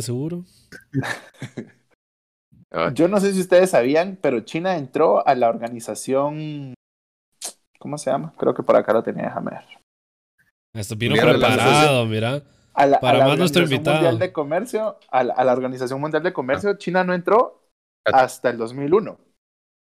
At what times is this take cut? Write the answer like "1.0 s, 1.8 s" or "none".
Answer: none